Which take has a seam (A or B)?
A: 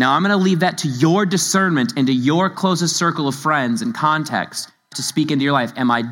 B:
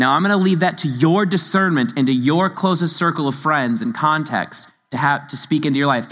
A